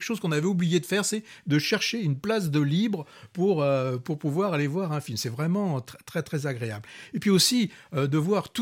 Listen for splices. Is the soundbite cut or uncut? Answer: uncut